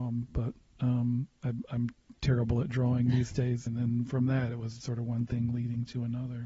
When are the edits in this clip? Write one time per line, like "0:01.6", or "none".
0:03.7
0:04.8